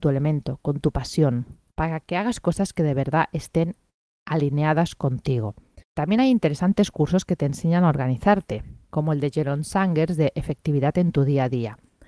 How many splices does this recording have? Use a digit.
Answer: 1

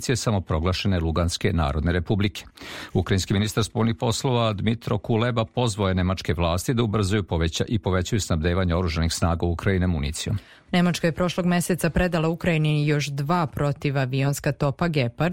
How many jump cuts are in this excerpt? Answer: 1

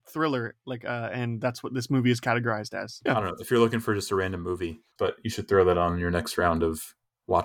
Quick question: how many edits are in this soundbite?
2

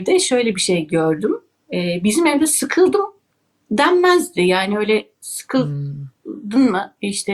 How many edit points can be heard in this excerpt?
0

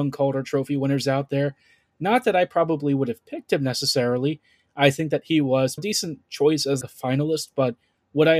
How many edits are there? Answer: 2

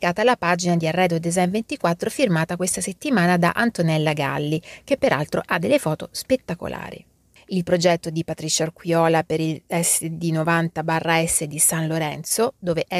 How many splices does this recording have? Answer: 1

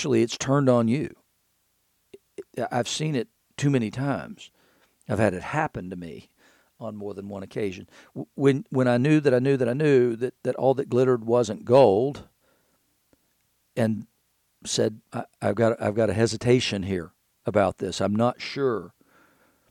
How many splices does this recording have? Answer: 1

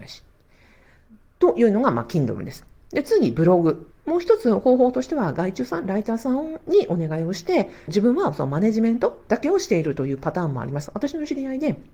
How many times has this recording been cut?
3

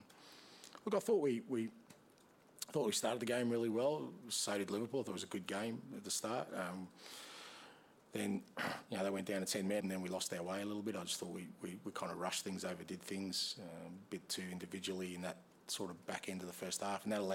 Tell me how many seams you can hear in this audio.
1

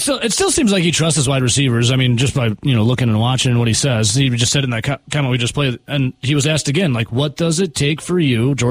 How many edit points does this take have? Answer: 0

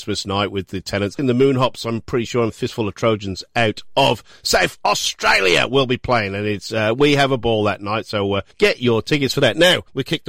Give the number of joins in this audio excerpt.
1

